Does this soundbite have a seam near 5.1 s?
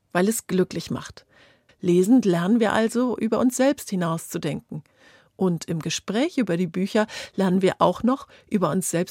no; 1 cut; at 1.7 s

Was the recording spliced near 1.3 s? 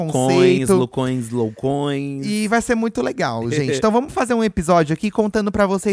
no; 0 cuts

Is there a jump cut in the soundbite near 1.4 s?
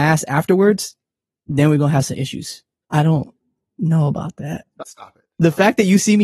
no; 2 cuts; at 2.8 s, 4.8 s

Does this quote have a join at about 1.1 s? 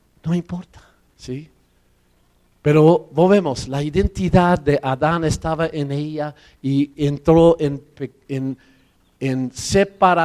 yes; 1 cut; at 1.1 s

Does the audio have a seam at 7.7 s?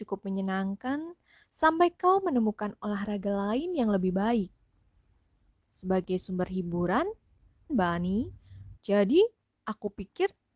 yes; 2 cuts; at 7.7 s, 8.8 s

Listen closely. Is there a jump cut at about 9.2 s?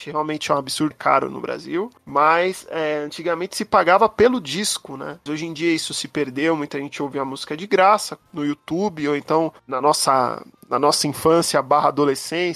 no; 2 cuts; at 0.9 s, 5.3 s

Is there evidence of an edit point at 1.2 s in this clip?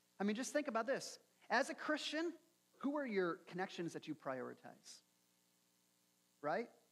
no; 1 cut; at 2.7 s

